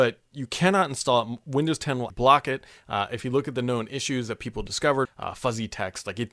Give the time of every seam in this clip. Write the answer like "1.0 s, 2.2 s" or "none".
2.1 s, 5.1 s